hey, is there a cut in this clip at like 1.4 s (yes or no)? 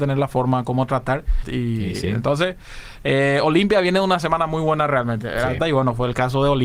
yes